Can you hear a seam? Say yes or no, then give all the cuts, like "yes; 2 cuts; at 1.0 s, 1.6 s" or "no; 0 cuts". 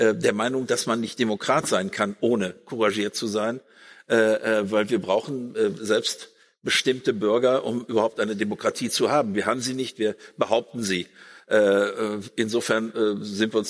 no; 0 cuts